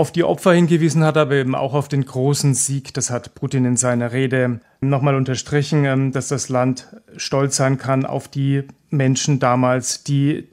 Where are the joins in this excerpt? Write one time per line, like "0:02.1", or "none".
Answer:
none